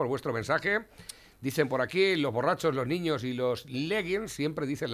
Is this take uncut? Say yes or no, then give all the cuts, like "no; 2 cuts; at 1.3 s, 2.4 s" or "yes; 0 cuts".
yes; 0 cuts